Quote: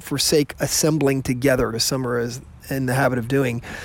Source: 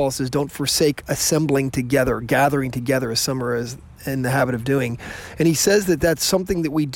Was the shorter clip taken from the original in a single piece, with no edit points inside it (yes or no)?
no